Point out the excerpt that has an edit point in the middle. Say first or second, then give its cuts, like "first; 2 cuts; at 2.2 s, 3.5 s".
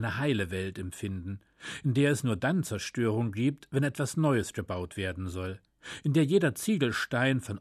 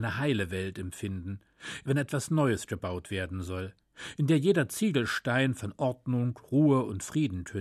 second; 1 cut; at 1.8 s